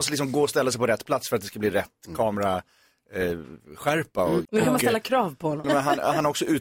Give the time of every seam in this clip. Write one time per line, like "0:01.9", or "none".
0:04.5
0:05.6